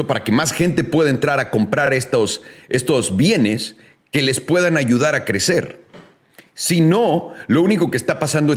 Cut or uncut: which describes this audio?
uncut